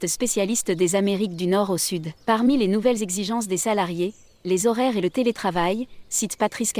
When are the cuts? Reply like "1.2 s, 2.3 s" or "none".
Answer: 2.2 s